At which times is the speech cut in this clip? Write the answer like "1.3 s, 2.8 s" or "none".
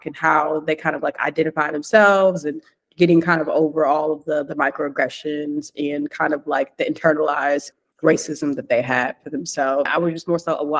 9.9 s